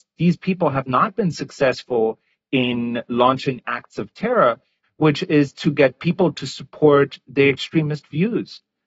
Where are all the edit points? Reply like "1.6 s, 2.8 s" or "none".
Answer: 4.8 s